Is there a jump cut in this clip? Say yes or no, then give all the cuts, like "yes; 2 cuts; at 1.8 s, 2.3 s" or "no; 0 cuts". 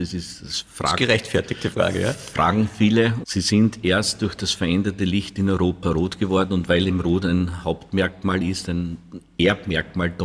yes; 1 cut; at 3.2 s